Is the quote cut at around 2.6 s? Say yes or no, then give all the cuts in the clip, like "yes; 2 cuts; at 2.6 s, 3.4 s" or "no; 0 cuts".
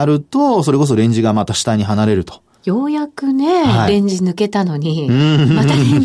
yes; 1 cut; at 2.6 s